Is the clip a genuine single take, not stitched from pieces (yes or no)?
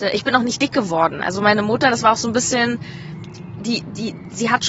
yes